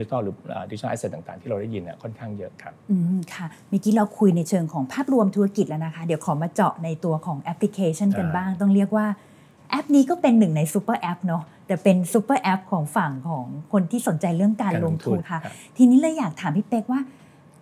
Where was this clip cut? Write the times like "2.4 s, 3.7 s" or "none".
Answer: 15.2 s